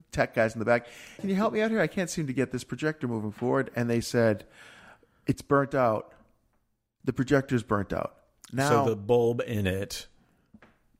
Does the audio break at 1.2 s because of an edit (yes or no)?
yes